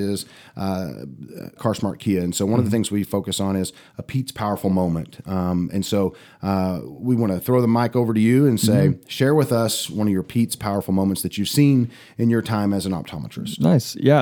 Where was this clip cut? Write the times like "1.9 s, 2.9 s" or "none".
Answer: 1.6 s